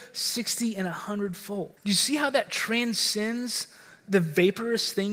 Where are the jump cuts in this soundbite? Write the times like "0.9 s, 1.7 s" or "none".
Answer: 1.8 s